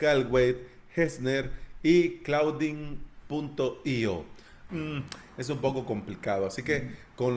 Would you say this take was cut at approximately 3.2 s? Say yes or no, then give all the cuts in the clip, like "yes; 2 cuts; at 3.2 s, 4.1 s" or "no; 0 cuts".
no; 1 cut; at 4.7 s